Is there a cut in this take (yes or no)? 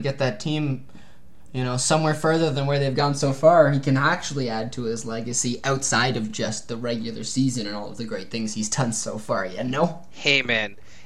no